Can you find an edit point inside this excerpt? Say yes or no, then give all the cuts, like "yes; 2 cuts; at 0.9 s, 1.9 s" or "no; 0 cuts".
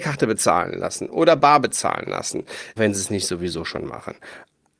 yes; 1 cut; at 2.8 s